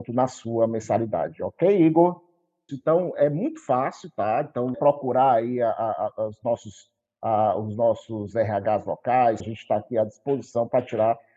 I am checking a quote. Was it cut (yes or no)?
yes